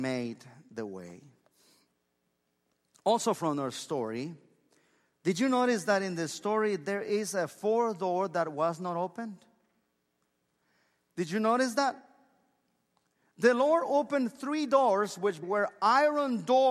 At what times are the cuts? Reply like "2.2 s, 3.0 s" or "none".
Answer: 15.4 s